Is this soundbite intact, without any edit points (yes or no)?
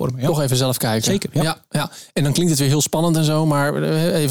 yes